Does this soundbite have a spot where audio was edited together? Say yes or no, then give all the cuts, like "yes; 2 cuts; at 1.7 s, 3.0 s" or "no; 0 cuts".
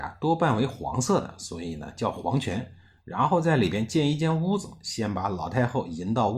no; 0 cuts